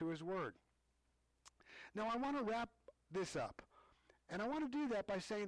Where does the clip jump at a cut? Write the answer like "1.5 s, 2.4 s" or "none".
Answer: none